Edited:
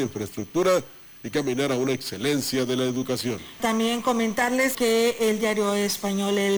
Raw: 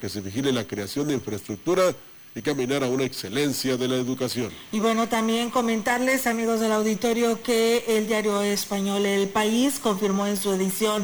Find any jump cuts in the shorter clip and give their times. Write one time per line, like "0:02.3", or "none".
0:03.6
0:04.7